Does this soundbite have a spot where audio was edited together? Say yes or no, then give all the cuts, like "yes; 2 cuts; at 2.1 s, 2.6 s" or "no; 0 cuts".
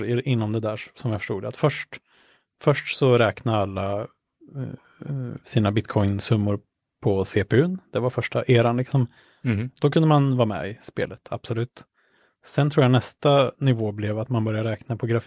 no; 0 cuts